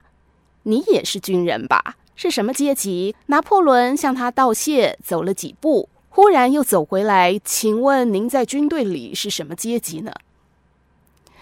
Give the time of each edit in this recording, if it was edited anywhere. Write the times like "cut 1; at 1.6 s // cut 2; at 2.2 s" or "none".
cut 1; at 3.1 s // cut 2; at 7.4 s